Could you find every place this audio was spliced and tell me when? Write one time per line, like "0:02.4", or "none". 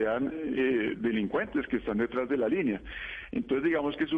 none